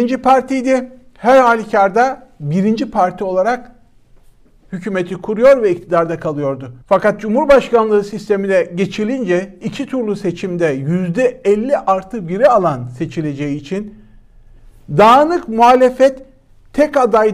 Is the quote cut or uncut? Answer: cut